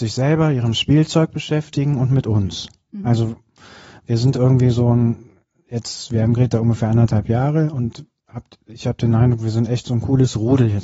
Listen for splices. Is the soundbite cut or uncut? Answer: cut